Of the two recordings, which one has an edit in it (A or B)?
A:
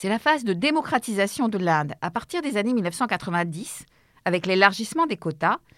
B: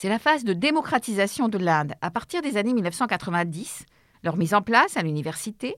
B